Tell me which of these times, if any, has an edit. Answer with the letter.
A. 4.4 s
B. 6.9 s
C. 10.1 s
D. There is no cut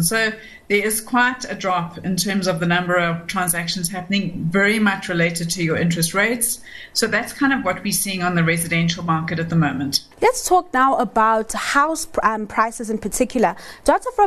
C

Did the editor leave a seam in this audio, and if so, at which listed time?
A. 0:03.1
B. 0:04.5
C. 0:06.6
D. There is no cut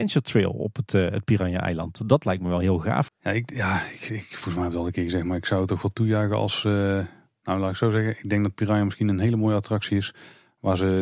A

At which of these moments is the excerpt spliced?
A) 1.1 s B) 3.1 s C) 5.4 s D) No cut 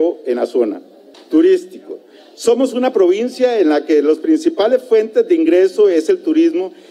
A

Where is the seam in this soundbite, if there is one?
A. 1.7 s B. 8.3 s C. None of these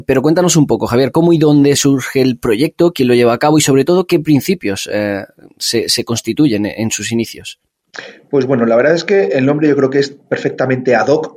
A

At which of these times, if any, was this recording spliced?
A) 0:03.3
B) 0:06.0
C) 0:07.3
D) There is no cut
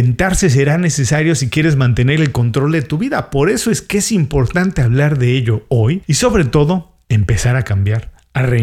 D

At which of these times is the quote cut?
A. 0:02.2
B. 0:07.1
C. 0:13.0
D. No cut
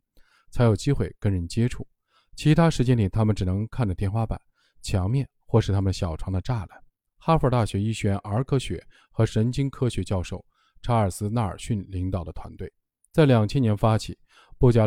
B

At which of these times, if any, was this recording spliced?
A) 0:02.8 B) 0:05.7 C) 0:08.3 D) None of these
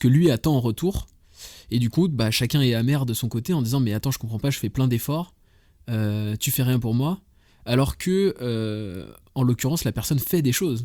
D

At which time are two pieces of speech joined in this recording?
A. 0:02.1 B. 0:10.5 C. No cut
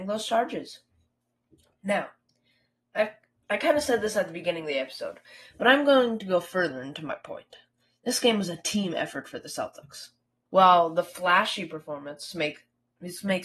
B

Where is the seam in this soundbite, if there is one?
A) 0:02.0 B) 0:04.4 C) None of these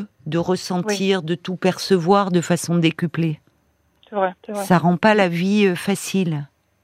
B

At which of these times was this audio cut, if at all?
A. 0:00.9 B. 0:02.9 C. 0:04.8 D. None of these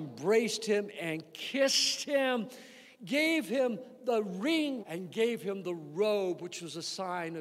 C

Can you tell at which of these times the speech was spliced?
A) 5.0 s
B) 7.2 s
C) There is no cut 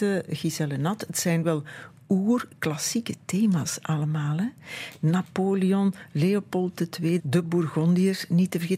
B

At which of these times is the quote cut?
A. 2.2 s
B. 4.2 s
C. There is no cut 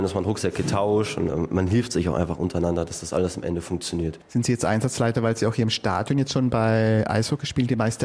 B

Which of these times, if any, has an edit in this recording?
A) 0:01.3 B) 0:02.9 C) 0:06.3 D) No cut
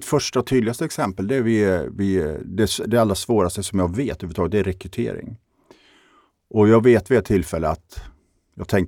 D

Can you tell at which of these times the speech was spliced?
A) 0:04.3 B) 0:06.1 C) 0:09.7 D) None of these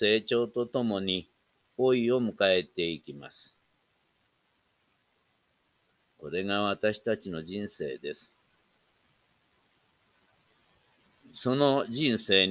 D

